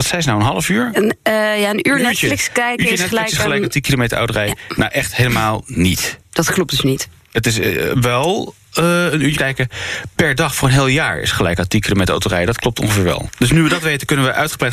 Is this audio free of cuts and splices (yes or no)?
no